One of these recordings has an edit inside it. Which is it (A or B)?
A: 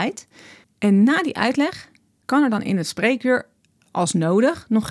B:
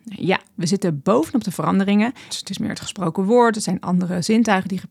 B